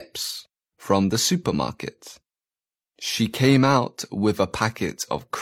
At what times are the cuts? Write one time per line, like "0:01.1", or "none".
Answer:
none